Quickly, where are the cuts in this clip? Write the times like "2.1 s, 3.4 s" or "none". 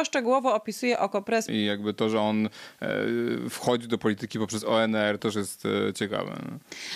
1.5 s, 5.2 s